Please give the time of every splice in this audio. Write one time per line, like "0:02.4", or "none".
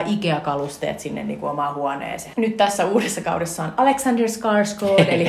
0:02.3